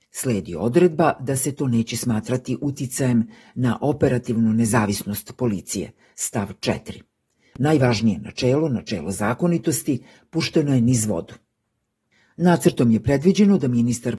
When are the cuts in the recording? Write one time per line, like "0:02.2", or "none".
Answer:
0:07.5